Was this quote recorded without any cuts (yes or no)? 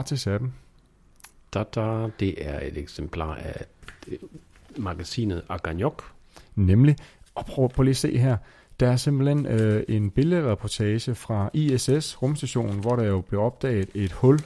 yes